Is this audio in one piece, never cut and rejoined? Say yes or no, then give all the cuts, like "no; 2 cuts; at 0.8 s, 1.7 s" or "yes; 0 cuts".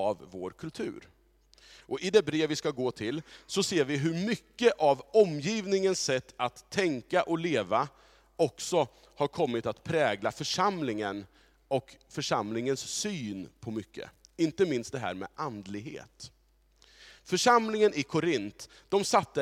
yes; 0 cuts